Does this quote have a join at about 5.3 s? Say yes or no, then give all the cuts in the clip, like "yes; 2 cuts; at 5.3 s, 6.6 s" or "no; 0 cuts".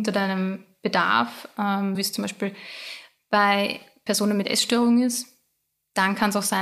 no; 2 cuts; at 1.9 s, 4.1 s